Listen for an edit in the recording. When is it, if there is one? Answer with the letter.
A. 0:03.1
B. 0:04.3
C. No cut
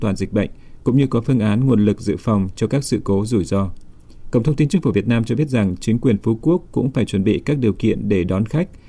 B